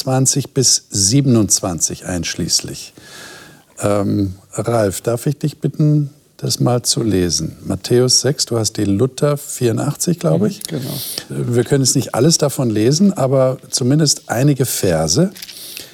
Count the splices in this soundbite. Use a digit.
1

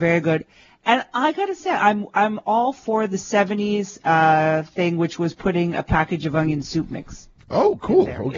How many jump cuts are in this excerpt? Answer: 0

